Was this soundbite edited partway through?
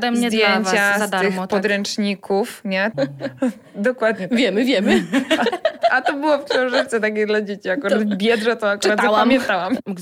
yes; 1 cut; at 2.9 s

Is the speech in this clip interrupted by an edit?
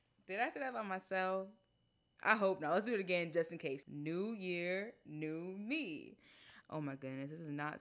yes; 2 cuts; at 3.8 s, 6.6 s

